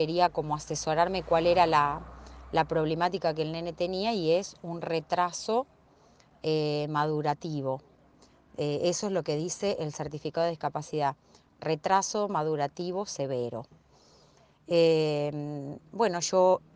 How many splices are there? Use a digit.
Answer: 0